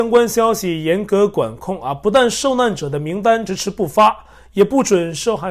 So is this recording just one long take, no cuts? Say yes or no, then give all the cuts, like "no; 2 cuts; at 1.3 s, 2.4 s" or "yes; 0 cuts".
no; 1 cut; at 3.5 s